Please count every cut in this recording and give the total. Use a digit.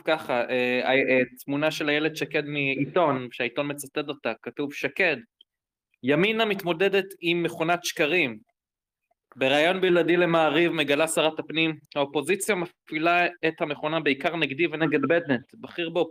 0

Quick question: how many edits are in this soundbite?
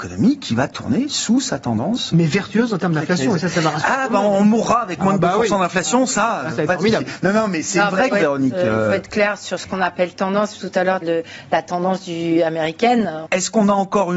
3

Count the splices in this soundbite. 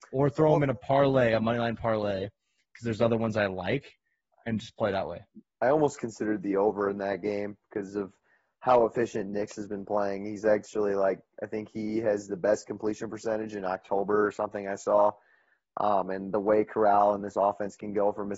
0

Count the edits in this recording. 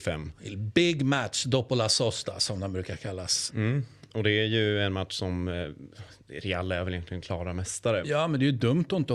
2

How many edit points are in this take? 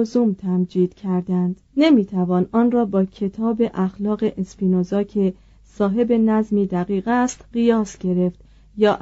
1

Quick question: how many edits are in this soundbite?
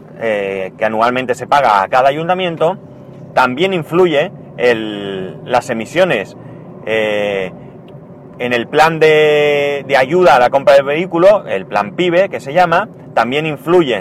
0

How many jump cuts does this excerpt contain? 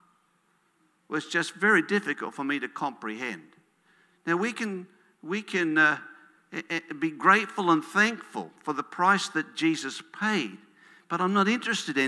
0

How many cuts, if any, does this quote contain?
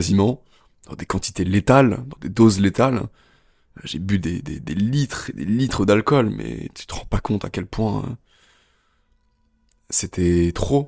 0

